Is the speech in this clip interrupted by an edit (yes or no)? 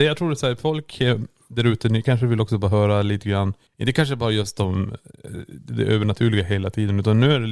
no